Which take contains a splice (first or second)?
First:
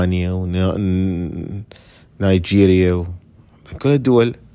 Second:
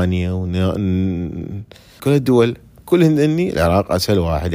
second